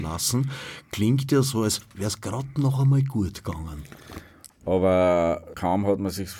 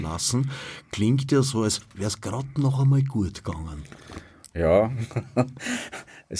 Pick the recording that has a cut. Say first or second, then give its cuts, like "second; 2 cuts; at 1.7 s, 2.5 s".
first; 1 cut; at 4.5 s